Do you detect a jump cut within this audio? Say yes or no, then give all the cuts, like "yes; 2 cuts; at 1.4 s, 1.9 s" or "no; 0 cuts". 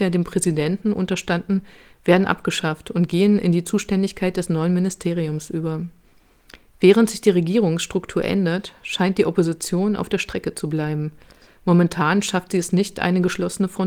no; 0 cuts